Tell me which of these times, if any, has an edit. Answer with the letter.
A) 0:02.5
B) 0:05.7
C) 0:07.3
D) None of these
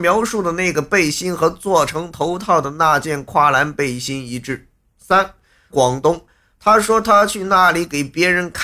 B